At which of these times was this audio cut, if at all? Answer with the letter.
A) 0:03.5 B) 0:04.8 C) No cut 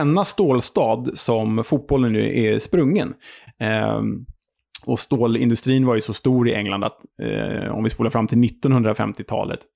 A